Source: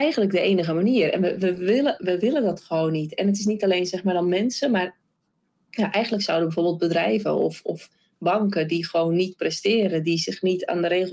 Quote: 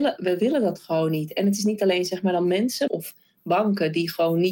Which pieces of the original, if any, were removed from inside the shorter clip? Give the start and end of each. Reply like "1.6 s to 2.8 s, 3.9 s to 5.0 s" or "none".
4.7 s to 7.6 s